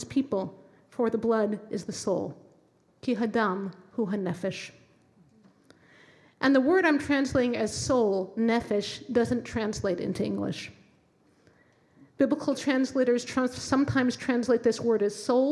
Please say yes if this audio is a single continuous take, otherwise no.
yes